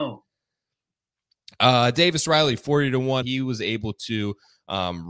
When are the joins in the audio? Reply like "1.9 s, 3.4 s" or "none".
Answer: 3.2 s